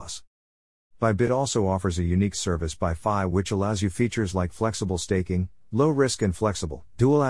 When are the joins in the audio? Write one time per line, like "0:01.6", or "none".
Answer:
none